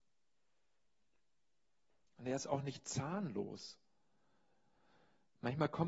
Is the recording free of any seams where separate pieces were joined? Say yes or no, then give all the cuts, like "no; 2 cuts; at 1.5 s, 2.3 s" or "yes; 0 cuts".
yes; 0 cuts